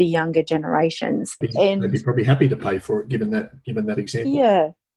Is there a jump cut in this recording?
yes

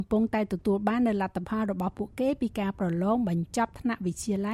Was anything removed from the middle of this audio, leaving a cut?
no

